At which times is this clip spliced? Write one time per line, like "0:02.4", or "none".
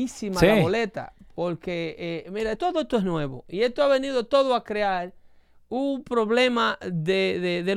0:02.6

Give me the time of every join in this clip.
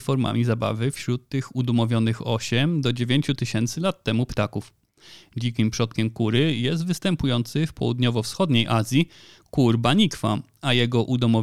none

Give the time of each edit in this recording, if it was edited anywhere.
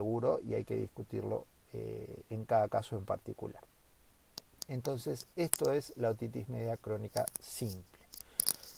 none

